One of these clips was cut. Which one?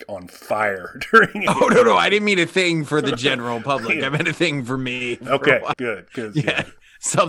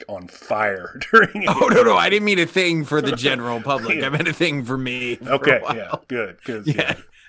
first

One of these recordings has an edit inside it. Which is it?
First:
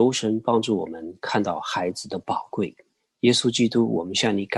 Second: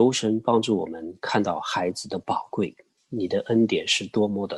second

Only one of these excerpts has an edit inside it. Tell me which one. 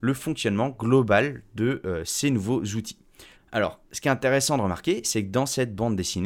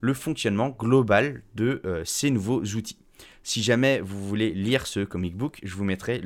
first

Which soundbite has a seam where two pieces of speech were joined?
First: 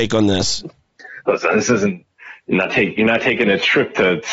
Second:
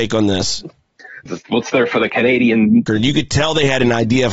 second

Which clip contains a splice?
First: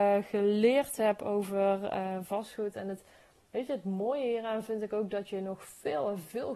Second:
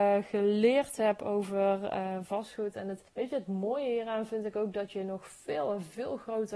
second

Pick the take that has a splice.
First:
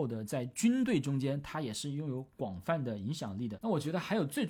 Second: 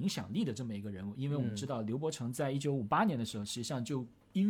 first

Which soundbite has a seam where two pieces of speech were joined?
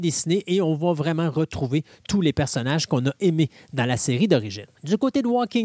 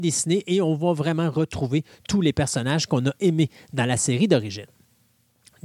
first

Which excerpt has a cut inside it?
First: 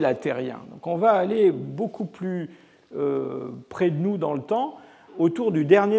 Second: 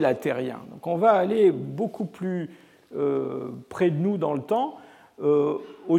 first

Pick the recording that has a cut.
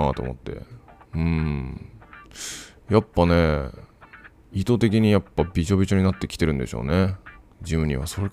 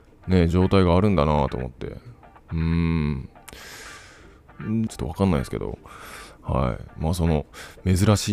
second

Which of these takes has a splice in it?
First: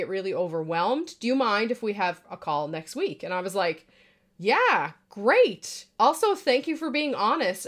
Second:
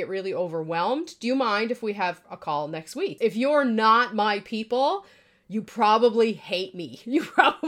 second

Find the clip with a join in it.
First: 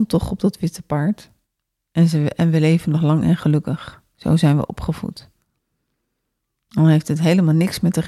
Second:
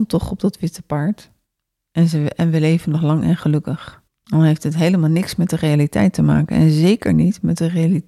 second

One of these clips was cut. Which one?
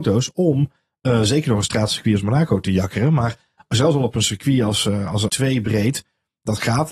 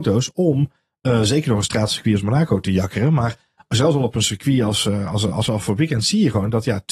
first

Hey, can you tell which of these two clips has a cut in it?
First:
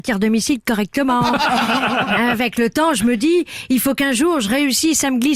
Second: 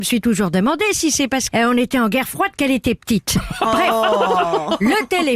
second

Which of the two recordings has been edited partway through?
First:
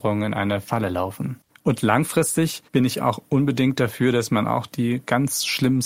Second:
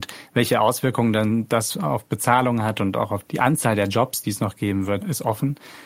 first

